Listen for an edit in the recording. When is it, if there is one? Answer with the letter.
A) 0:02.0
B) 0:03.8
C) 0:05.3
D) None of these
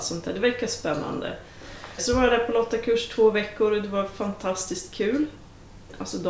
A